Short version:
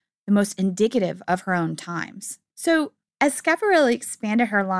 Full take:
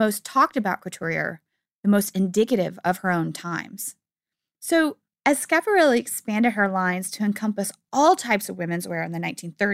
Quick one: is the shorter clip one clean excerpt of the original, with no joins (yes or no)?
no